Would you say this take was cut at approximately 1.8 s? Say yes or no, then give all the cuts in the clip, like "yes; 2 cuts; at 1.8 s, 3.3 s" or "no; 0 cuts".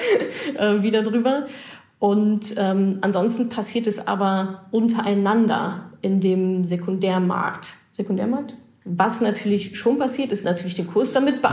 no; 2 cuts; at 8.8 s, 10.4 s